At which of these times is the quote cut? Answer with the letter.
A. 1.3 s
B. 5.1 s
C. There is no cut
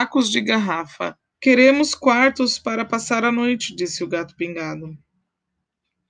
A